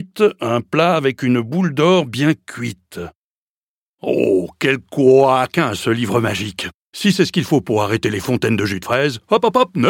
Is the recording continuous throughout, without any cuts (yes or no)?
no